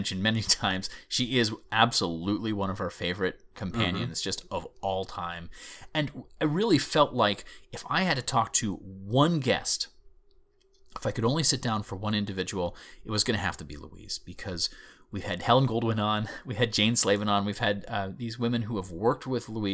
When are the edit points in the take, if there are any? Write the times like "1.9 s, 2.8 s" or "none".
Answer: none